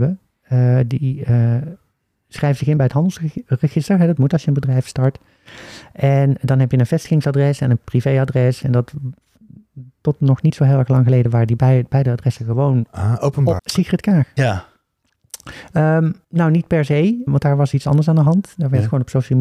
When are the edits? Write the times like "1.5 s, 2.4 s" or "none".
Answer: 13.6 s, 16.2 s, 17.3 s